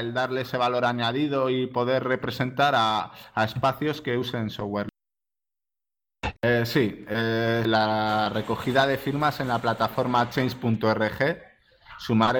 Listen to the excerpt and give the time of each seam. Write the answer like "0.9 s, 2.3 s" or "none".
6.4 s, 7.6 s